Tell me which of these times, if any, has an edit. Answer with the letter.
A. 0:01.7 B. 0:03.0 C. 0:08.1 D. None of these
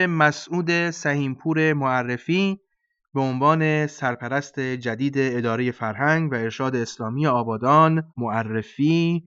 C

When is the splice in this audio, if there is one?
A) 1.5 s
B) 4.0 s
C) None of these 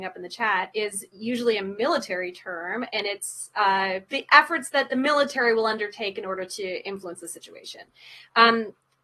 B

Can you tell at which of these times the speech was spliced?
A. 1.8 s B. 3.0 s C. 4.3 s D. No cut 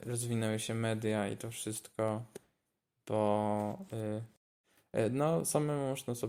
D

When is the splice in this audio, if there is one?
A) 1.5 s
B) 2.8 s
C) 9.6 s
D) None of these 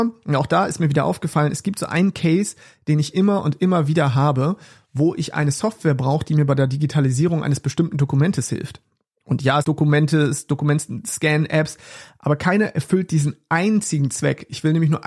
C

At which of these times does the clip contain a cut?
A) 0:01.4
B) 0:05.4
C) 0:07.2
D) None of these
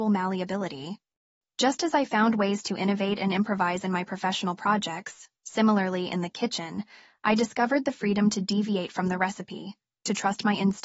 D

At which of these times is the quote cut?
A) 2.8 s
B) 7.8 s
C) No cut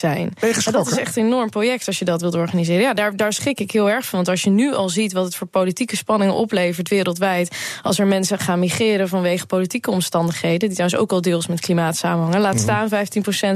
C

